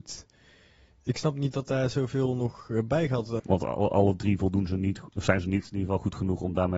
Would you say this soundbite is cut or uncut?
cut